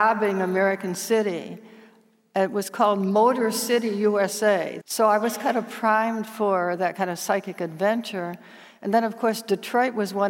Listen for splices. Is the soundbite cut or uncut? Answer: cut